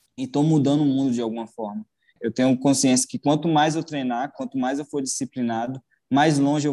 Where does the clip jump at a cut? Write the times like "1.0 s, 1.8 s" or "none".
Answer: 2.1 s, 4.3 s